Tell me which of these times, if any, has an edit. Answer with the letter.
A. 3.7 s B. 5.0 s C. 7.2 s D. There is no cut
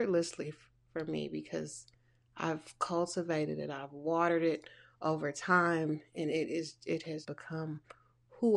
C